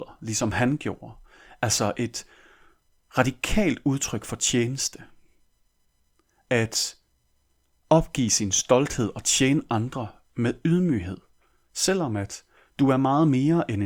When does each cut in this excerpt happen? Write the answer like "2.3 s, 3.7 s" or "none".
none